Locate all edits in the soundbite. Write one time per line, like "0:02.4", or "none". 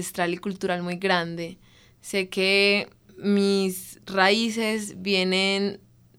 none